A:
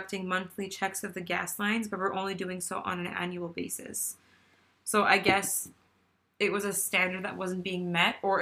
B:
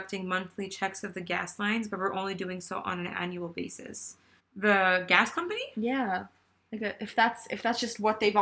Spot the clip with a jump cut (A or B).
B